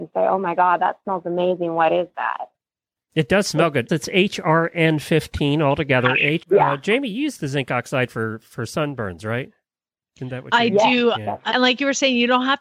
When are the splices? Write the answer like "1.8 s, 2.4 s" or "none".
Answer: 3.9 s, 6.4 s, 11.5 s